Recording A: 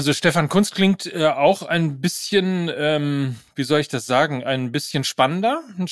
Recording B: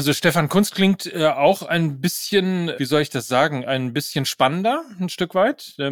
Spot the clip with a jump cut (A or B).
B